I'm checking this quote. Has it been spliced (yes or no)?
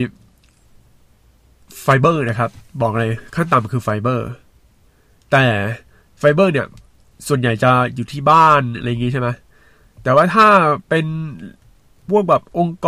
no